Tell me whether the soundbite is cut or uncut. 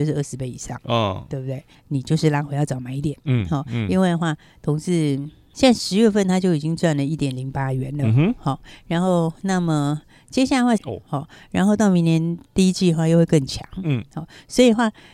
cut